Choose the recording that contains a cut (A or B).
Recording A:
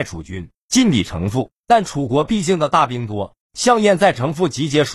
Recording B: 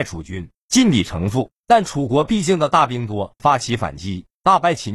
B